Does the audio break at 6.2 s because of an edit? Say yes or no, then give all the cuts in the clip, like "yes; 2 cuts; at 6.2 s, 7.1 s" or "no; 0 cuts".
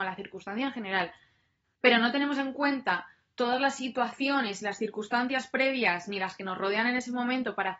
no; 1 cut; at 1.6 s